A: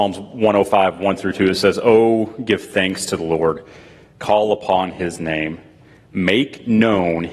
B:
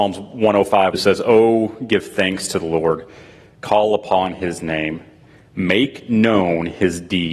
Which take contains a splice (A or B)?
B